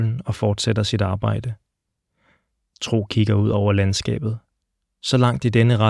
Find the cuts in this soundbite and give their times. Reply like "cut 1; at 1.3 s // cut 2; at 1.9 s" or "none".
none

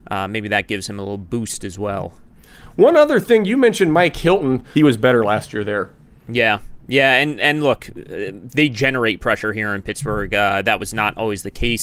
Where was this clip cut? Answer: cut 1; at 4.7 s

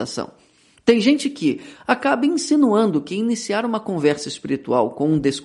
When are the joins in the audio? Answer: cut 1; at 1.7 s

